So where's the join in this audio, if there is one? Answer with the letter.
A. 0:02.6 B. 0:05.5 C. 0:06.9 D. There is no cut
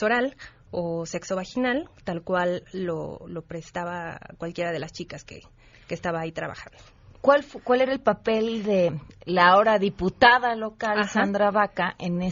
D